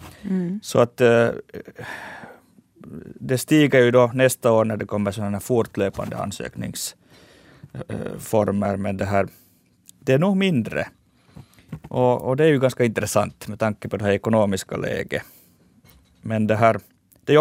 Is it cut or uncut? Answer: uncut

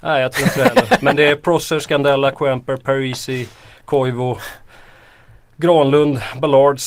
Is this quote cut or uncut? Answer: uncut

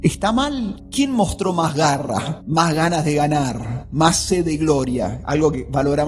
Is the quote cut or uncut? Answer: uncut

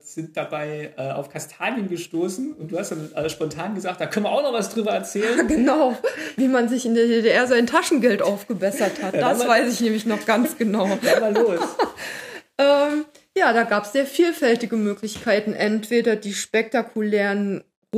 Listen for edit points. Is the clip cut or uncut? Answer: uncut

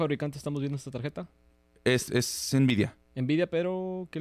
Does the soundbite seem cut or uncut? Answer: cut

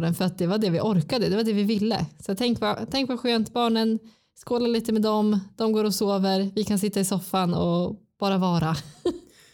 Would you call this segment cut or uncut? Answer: uncut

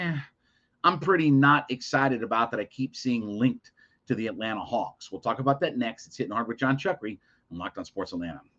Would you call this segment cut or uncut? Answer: uncut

